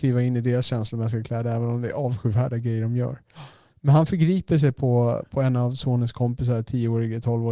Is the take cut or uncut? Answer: uncut